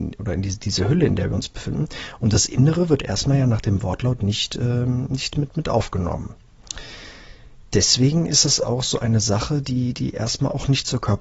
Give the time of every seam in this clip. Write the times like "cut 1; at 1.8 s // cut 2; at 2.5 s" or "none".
none

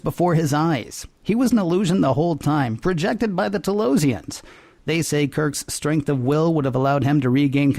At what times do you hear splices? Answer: none

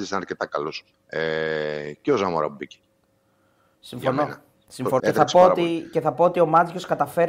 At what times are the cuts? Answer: cut 1; at 0.9 s // cut 2; at 5.0 s

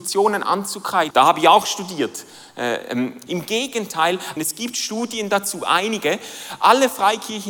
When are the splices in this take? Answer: cut 1; at 1.1 s // cut 2; at 3.3 s // cut 3; at 4.4 s

